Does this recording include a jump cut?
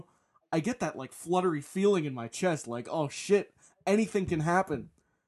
no; 0 cuts

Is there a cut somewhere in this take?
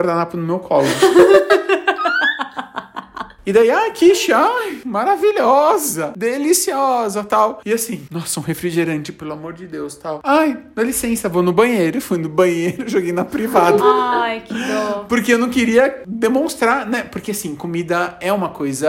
no; 0 cuts

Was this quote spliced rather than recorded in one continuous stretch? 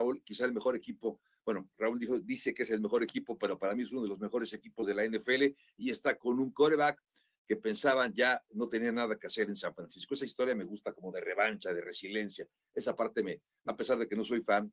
yes; 1 cut; at 13.7 s

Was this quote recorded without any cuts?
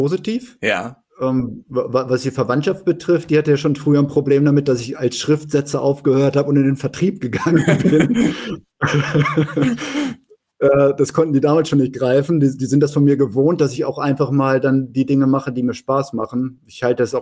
yes; 0 cuts

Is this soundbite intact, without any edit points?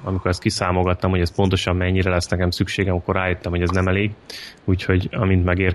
yes; 0 cuts

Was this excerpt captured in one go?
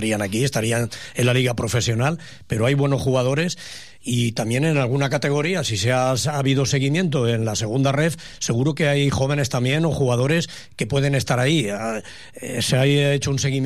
yes; 0 cuts

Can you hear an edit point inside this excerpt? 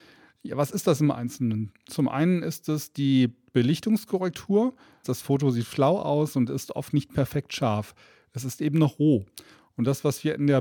yes; 1 cut; at 5.0 s

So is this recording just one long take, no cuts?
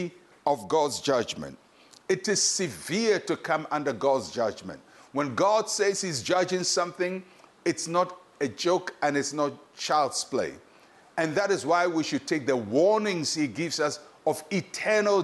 yes; 0 cuts

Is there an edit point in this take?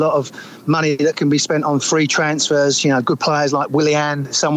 no; 0 cuts

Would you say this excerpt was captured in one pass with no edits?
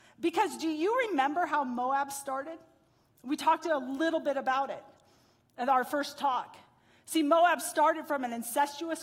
yes; 0 cuts

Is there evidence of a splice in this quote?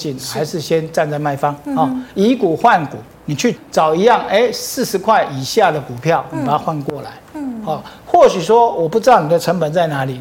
yes; 1 cut; at 3.5 s

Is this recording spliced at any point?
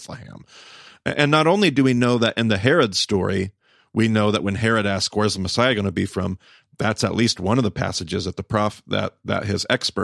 no; 0 cuts

